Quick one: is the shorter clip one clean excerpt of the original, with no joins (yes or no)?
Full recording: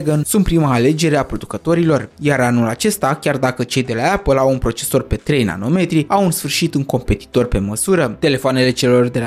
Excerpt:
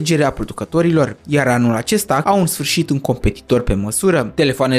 no